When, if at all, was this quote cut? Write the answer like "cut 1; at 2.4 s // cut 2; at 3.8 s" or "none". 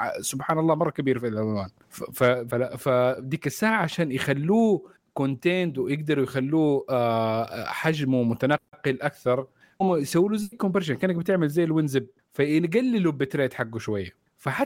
cut 1; at 2.5 s